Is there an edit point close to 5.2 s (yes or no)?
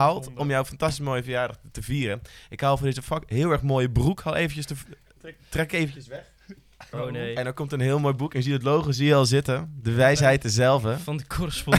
yes